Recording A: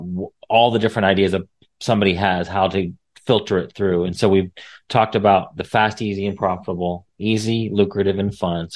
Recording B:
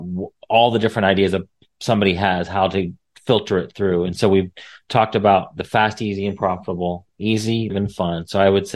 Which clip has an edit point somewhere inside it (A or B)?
B